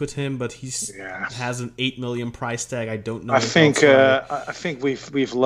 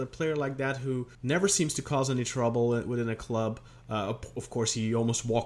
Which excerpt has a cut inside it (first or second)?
second